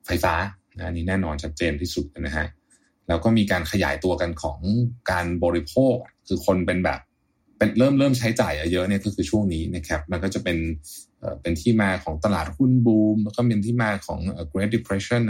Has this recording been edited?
no; 0 cuts

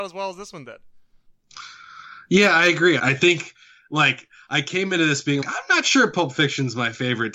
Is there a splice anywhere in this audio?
yes; 2 cuts; at 3.0 s, 5.4 s

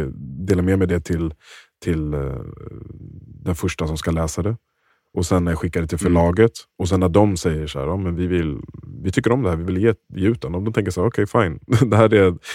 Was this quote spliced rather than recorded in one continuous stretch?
no; 0 cuts

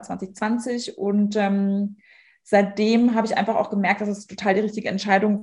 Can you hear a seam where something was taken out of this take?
no; 0 cuts

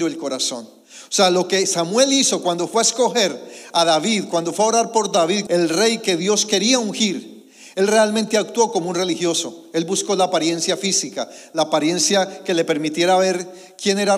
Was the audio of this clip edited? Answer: yes; 1 cut; at 5.5 s

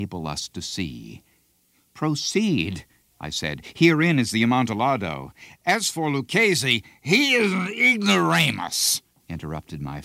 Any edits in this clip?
no; 0 cuts

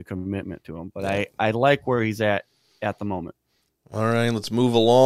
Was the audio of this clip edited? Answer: no; 0 cuts

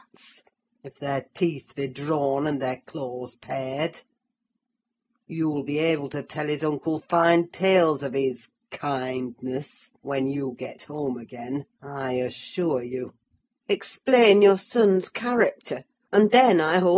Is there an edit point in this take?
yes; 2 cuts; at 13.6 s, 16.0 s

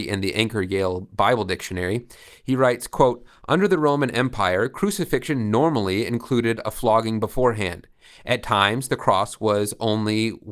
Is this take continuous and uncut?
yes; 0 cuts

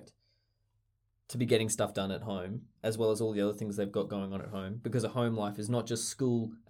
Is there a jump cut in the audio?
yes; 1 cut; at 2.8 s

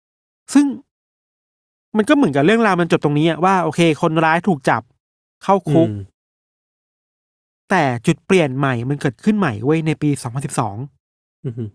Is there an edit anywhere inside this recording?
no; 0 cuts

